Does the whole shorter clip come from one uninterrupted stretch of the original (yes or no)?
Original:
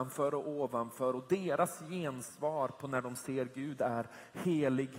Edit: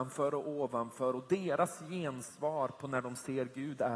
yes